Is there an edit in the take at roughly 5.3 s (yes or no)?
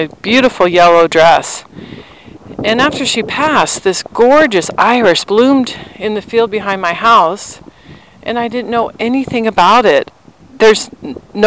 yes